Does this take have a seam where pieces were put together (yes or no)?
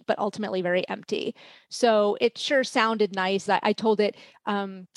yes